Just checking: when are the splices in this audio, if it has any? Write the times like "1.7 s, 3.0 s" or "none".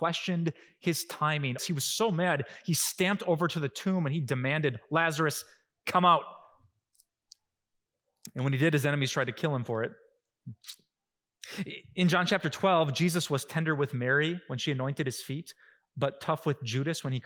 1.6 s